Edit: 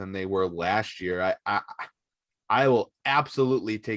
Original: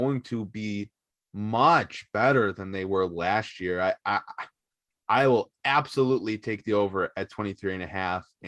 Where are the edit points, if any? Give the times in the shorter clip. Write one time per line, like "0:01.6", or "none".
none